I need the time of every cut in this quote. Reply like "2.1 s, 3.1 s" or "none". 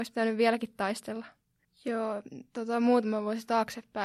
1.6 s